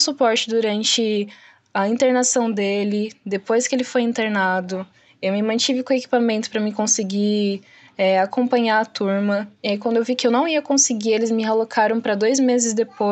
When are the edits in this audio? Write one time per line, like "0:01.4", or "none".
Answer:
none